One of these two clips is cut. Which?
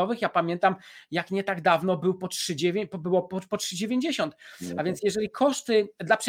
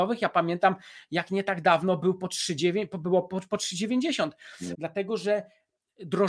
second; 1 cut; at 4.7 s

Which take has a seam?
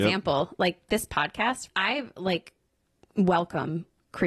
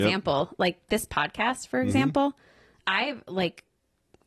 first; 1 cut; at 1.7 s

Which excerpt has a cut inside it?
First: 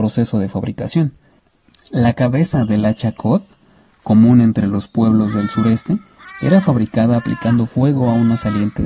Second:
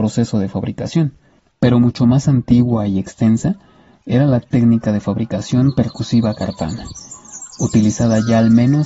second; 1 cut; at 1.5 s

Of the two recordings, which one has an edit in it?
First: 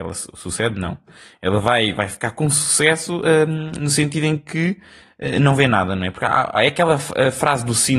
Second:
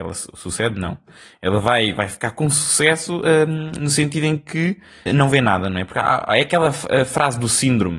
second; 1 cut; at 5.1 s

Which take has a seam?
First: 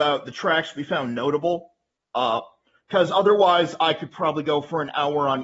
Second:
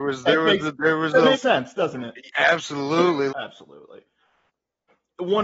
second; 2 cuts; at 1.3 s, 3.3 s

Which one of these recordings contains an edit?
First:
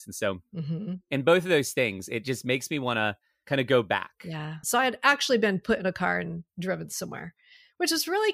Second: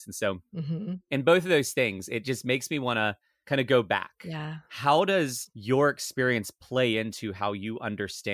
first; 2 cuts; at 4.6 s, 6.5 s

